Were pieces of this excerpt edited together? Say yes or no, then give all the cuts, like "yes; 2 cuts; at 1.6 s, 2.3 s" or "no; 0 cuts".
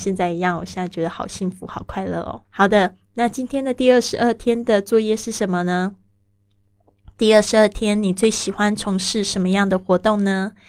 yes; 1 cut; at 2.4 s